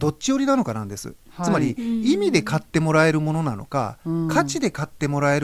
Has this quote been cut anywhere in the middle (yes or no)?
no